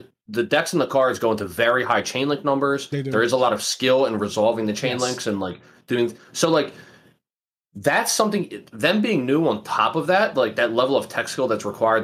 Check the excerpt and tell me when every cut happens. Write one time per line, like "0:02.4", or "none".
none

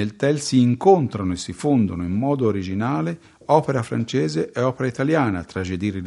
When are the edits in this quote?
none

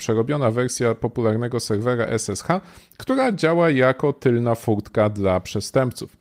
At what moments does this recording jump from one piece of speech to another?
none

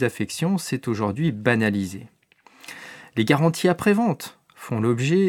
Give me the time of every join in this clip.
none

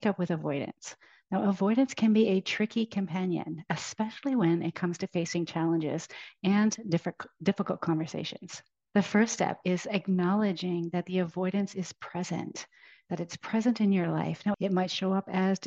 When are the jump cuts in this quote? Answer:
0:08.9
0:14.5

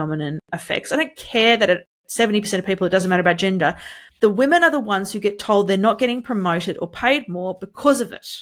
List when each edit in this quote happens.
0:04.1

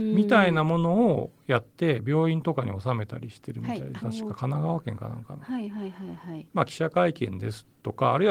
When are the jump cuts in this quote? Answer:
0:04.0
0:06.5

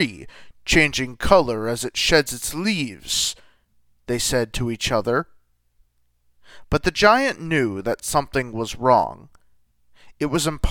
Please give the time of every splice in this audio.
none

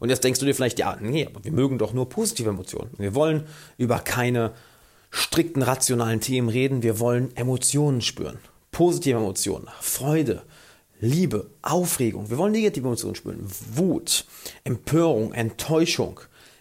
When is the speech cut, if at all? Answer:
0:03.0

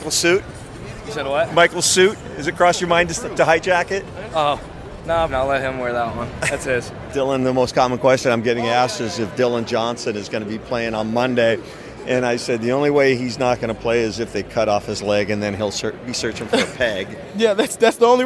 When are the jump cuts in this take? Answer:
0:05.3

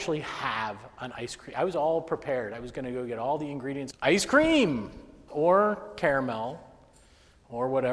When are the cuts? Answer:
0:03.9
0:05.3

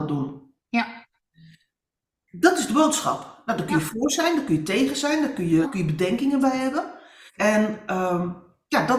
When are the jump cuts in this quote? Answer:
0:05.6
0:07.3

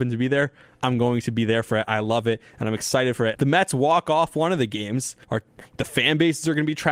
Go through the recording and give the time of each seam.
0:03.3
0:05.2

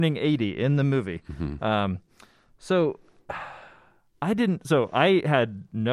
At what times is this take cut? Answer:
none

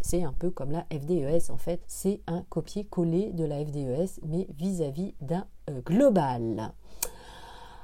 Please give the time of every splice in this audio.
0:01.8
0:05.8

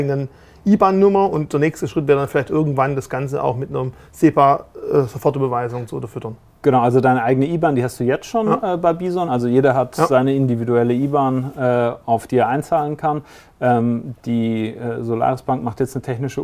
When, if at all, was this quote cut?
none

